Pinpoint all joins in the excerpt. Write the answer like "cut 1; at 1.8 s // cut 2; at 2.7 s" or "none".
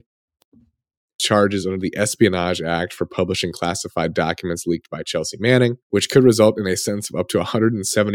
cut 1; at 1.2 s // cut 2; at 5.8 s